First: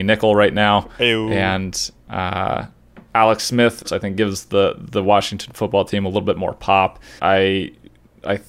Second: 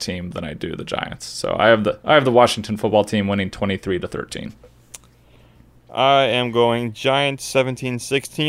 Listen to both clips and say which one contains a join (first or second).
first